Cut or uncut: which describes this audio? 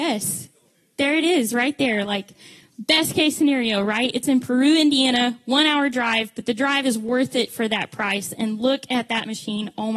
uncut